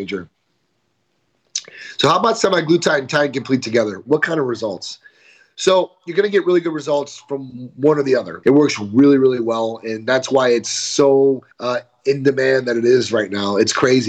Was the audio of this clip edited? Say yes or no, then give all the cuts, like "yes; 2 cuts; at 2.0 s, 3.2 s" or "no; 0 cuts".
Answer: yes; 2 cuts; at 8.4 s, 11.5 s